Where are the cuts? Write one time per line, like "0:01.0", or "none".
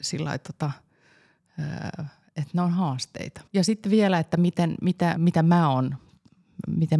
0:03.5
0:05.2